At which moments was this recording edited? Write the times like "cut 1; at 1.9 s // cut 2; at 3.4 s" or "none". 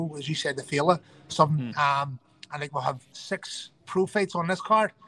cut 1; at 1.7 s // cut 2; at 3.8 s